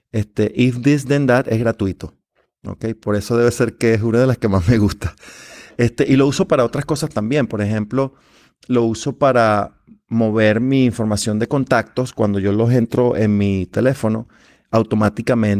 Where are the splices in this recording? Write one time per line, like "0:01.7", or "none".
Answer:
none